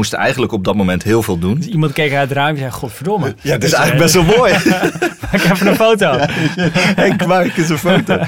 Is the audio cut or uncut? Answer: uncut